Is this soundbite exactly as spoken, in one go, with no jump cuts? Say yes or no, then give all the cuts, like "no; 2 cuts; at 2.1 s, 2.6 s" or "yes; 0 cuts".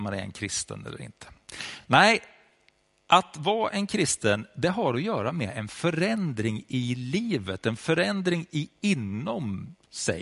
yes; 0 cuts